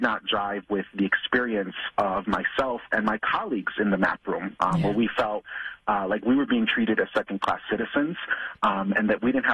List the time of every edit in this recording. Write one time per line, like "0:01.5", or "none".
none